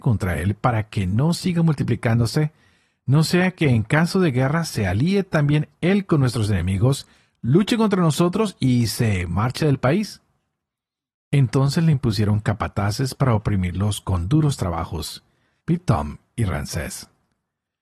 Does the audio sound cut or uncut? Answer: cut